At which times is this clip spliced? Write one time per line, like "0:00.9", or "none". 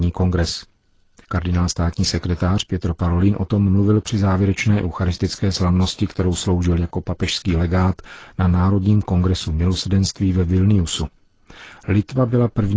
0:01.2